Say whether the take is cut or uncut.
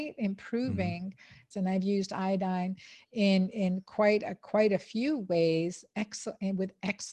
cut